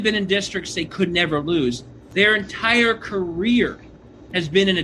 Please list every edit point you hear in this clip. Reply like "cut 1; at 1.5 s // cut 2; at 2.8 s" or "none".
none